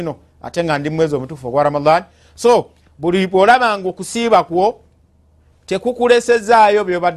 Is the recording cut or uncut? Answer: uncut